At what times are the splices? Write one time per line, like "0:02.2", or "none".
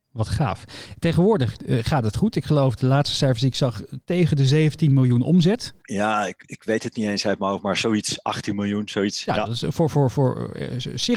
0:05.8